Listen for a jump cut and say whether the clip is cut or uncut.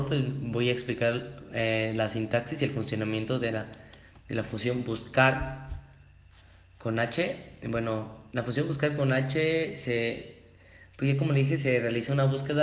uncut